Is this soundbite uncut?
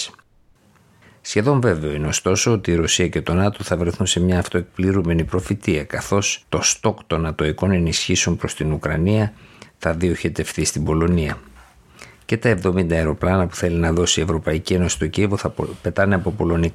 no; 1 cut; at 6.4 s

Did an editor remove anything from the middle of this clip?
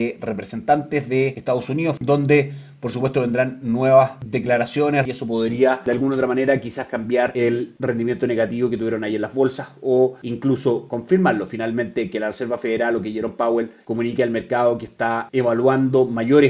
yes; 2 cuts; at 2.0 s, 5.1 s

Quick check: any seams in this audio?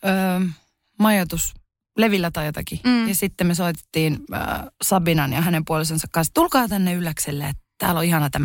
no; 0 cuts

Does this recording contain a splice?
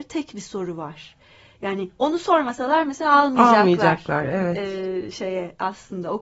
no; 0 cuts

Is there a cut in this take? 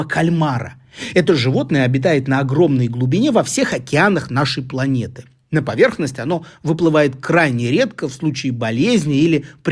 no; 0 cuts

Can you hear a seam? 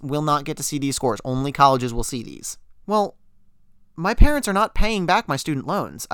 yes; 1 cut; at 2.8 s

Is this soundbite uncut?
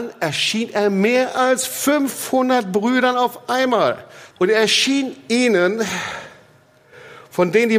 no; 1 cut; at 4.3 s

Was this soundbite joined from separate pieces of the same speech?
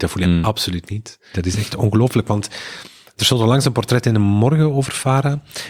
yes; 1 cut; at 1.3 s

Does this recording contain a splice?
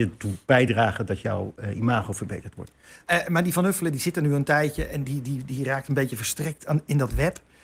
yes; 1 cut; at 5.0 s

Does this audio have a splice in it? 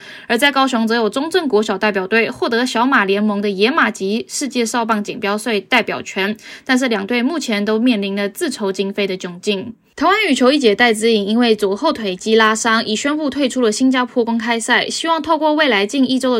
no; 0 cuts

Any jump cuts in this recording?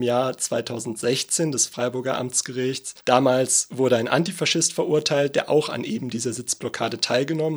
yes; 1 cut; at 3.0 s

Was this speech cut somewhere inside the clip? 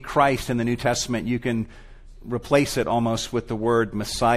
yes; 1 cut; at 2.1 s

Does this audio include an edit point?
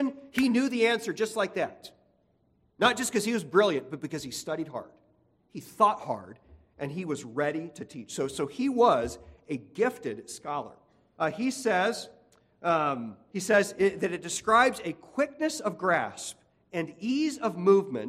yes; 2 cuts; at 11.1 s, 13.3 s

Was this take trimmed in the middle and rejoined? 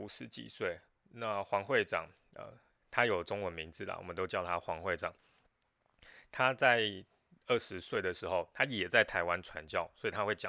no; 0 cuts

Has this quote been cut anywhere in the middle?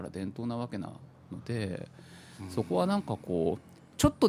no; 0 cuts

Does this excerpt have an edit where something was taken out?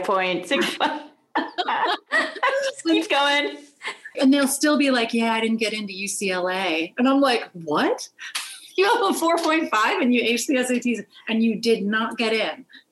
yes; 1 cut; at 4.1 s

